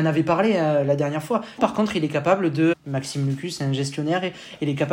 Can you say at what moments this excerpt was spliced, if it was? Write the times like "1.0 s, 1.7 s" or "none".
1.6 s, 2.7 s